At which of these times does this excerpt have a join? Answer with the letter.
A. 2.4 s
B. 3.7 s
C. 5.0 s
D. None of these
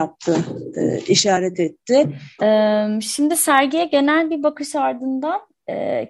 A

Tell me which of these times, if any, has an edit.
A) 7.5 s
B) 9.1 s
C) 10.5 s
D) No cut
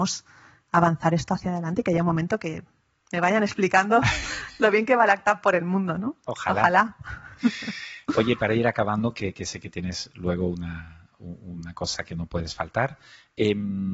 D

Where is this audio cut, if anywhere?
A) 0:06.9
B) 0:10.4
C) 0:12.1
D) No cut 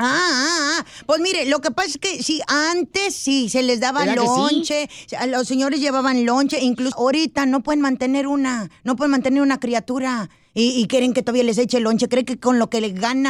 A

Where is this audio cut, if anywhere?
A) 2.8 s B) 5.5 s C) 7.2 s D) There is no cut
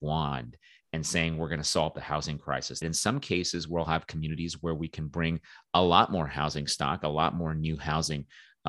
A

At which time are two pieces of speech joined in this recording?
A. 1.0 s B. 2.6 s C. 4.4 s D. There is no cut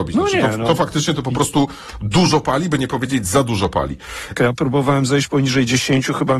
C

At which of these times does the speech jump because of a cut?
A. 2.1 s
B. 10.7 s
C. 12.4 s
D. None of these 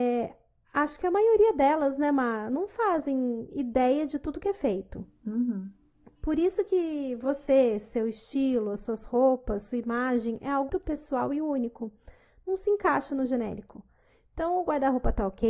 B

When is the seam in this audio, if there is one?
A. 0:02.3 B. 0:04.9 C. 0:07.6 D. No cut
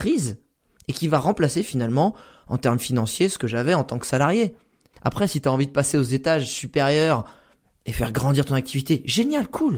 B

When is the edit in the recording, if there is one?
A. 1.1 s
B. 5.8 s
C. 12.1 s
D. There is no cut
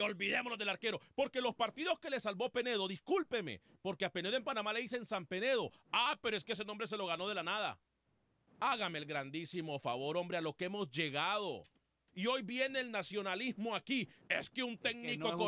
C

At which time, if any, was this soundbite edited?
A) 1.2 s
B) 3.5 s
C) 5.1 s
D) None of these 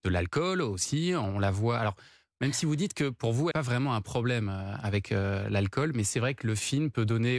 B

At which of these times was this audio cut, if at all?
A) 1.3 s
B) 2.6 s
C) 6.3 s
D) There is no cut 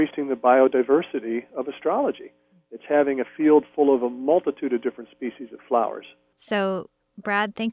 C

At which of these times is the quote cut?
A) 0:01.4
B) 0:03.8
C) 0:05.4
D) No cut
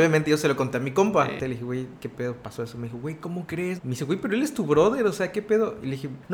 B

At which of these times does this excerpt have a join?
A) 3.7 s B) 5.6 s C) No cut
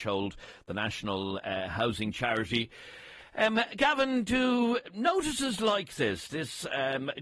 C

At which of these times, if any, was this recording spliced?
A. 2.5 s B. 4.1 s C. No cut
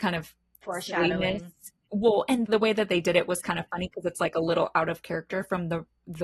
A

